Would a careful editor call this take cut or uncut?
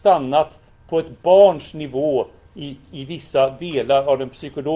uncut